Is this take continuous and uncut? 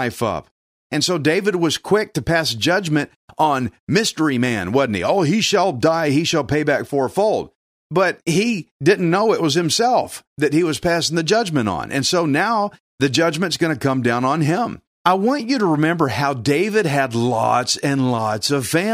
no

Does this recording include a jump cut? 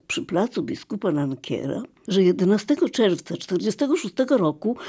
yes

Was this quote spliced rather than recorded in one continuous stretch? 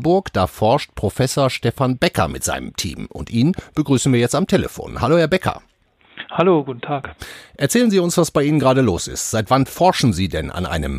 no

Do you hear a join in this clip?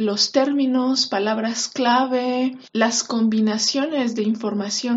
no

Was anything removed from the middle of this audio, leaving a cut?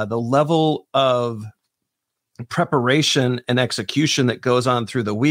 no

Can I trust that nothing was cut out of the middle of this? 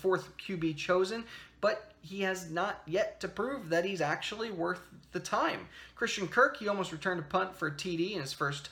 yes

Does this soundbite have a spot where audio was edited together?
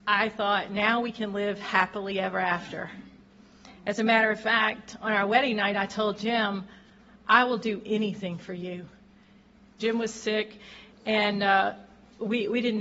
yes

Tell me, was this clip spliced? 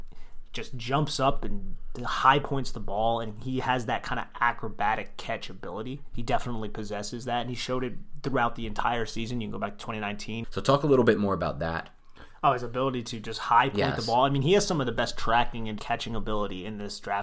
yes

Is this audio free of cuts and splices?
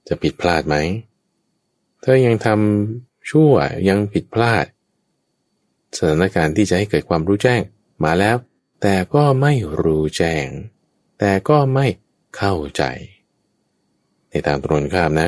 yes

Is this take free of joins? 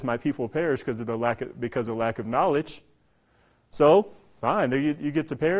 yes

